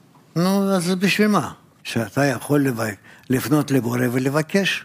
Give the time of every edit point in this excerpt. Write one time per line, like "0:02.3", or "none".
0:01.8